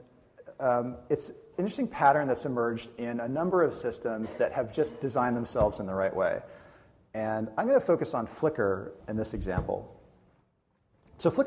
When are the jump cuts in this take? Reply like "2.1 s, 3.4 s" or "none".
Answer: 9.0 s